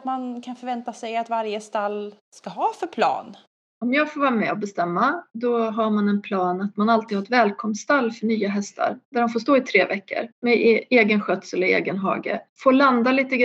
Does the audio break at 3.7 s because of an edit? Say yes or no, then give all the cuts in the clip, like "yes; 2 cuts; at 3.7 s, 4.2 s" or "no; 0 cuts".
yes; 3 cuts; at 2.2 s, 3.7 s, 10.3 s